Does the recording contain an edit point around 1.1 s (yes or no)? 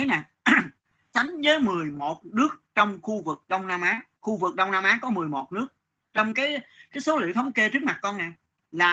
yes